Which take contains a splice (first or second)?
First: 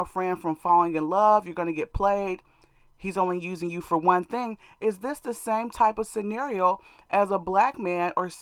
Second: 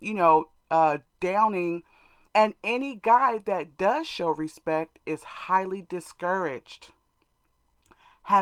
second